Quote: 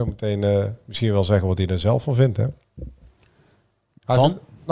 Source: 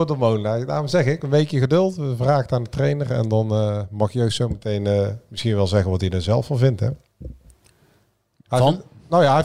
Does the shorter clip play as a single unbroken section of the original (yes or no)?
yes